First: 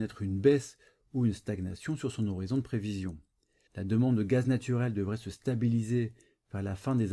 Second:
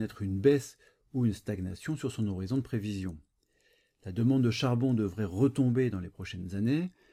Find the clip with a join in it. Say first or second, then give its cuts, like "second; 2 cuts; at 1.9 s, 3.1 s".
first; 1 cut; at 3.7 s